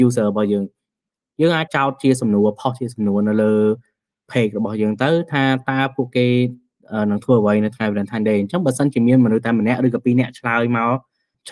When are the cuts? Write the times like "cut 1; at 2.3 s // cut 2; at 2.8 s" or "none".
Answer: cut 1; at 1.7 s